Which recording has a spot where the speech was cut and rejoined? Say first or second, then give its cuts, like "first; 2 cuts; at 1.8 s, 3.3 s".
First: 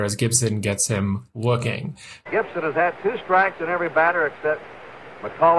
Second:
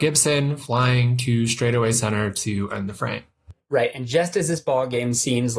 first; 1 cut; at 2.3 s